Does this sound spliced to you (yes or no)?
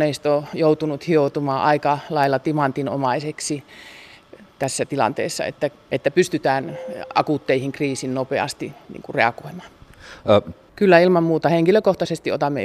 yes